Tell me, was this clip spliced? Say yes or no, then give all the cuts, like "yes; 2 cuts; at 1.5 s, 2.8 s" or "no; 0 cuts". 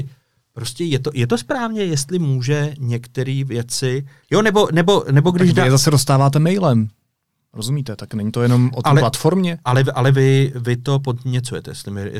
no; 0 cuts